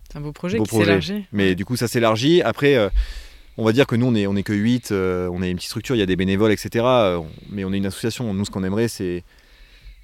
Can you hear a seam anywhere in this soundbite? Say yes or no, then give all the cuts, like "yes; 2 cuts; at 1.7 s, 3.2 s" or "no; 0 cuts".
no; 0 cuts